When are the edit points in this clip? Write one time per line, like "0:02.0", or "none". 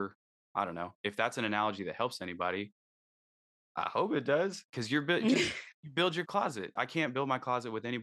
0:06.8